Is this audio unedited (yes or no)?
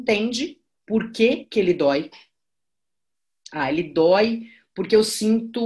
yes